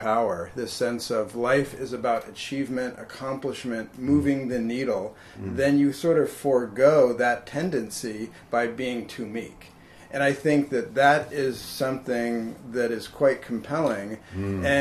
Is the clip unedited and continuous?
yes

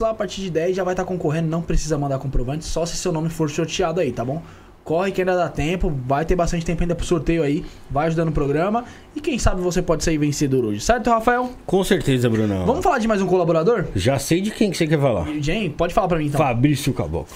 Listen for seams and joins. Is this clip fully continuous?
yes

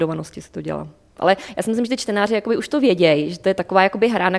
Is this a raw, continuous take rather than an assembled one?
yes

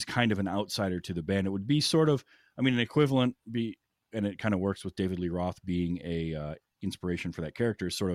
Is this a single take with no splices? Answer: yes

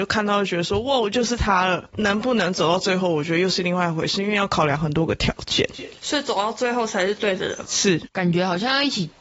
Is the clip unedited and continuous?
yes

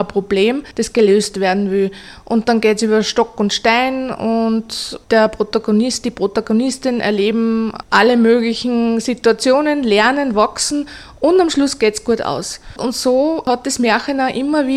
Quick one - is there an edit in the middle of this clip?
no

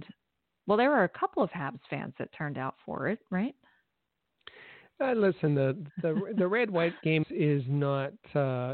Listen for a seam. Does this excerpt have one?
yes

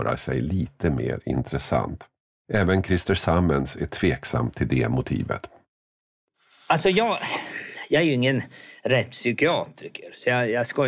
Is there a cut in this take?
no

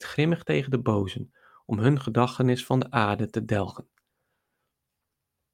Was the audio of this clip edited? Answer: no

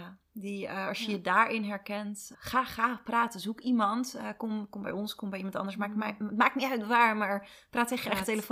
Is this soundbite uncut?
no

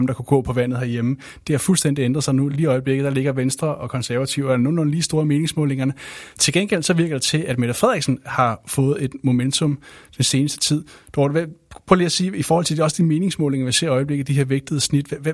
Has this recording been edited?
no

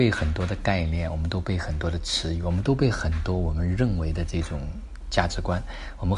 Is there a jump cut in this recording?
no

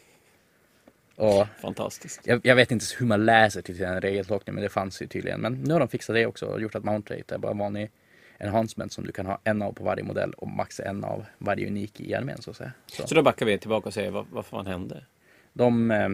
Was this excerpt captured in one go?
yes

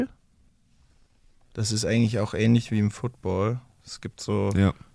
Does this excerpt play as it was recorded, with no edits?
yes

